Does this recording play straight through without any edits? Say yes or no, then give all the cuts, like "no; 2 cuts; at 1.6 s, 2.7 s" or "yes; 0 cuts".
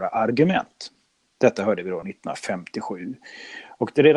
yes; 0 cuts